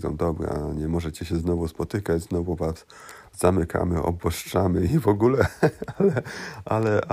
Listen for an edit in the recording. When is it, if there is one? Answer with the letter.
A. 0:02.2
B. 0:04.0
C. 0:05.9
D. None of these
D